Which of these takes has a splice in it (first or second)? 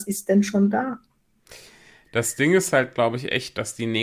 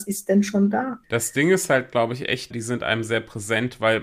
second